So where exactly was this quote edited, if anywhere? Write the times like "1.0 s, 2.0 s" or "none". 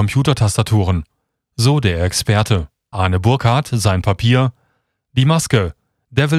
2.9 s